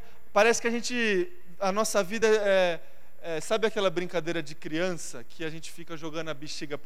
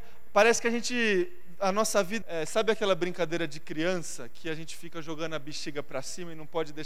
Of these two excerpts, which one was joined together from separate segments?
second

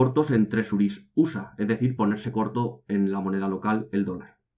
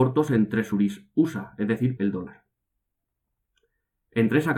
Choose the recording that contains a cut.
second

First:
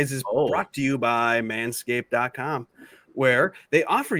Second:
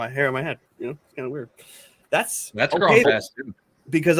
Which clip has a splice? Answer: second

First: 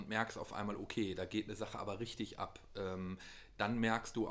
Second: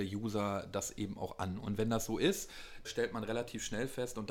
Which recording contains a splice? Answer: second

